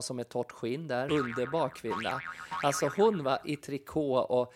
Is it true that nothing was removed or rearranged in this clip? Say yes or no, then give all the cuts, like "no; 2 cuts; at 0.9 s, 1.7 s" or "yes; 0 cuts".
no; 1 cut; at 1.1 s